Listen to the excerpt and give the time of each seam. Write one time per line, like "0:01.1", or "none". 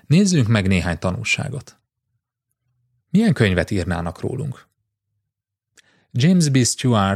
0:03.0